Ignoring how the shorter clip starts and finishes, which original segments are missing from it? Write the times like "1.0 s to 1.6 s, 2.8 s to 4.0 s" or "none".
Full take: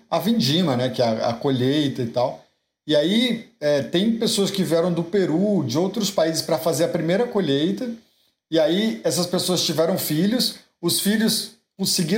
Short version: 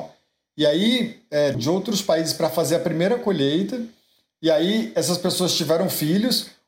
3.8 s to 5.6 s

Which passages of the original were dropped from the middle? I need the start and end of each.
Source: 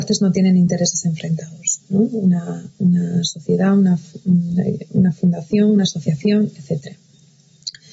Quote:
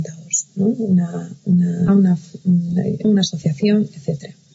3.2 s to 3.7 s, 4.9 s to 5.7 s

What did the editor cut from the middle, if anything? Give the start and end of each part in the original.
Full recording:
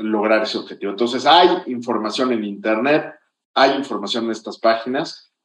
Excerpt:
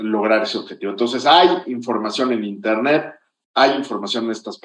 none

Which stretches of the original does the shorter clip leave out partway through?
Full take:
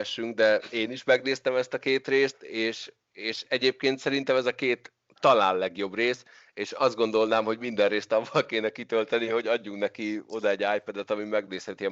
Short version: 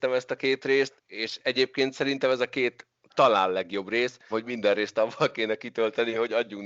2.4 s to 3.0 s, 6.4 s to 7.4 s

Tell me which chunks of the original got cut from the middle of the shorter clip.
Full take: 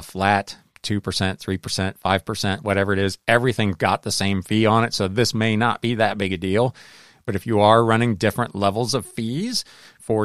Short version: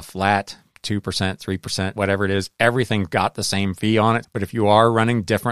1.9 s to 2.6 s, 4.9 s to 7.2 s

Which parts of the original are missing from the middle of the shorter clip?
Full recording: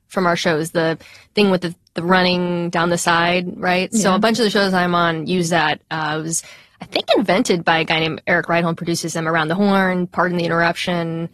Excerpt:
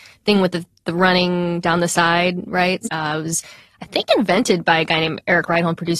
3.9 s to 5.8 s

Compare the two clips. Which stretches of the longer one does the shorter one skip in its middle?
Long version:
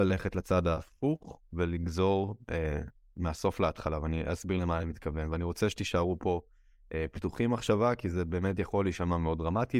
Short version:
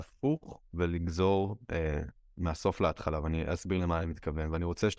none

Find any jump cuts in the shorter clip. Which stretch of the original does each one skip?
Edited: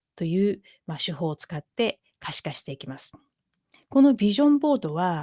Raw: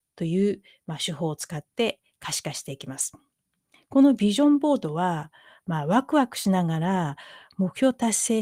none

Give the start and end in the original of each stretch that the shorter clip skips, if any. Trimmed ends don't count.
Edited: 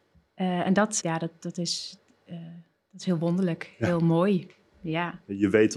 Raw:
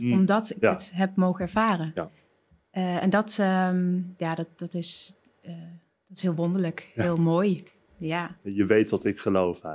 3.4 s to 4.2 s

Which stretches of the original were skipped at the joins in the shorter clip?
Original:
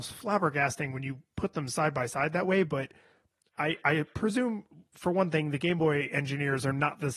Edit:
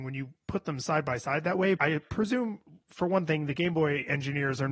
2.7 s to 3.8 s

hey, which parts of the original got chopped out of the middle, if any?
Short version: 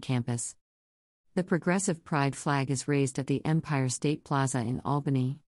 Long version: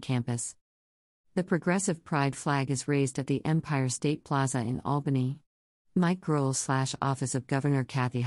none

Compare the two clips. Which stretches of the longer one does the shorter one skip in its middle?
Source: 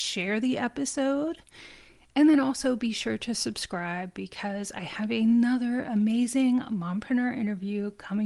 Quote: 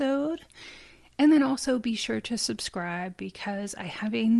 none

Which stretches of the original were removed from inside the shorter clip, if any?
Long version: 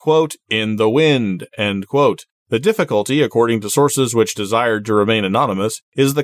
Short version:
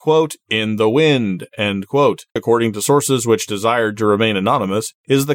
2.4 s to 3.2 s

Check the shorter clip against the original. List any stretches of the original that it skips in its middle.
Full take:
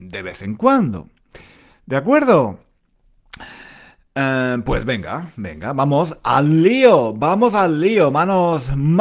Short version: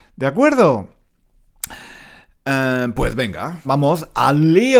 5.3 s to 5.7 s

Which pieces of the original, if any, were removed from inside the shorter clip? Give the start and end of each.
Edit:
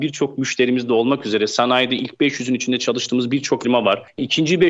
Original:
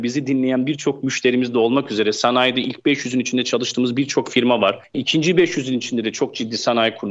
4.3 s to 4.4 s

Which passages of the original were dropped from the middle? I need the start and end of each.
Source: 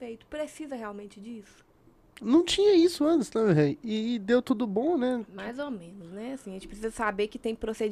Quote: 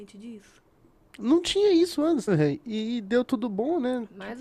3.3 s to 3.5 s

